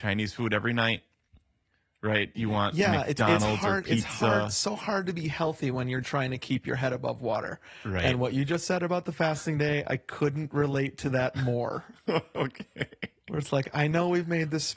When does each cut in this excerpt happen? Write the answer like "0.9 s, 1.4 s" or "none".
6.0 s